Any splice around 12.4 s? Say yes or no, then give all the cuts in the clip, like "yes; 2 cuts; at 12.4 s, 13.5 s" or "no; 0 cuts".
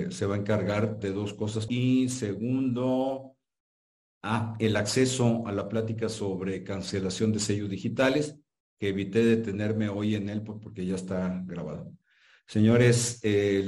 no; 1 cut; at 1.7 s